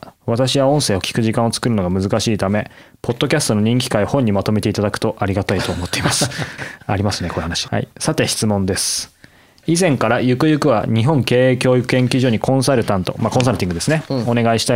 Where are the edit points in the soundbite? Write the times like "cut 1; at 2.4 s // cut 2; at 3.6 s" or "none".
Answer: cut 1; at 6.6 s // cut 2; at 7.7 s